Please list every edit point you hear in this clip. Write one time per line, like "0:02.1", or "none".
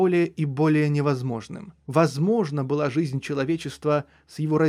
0:01.9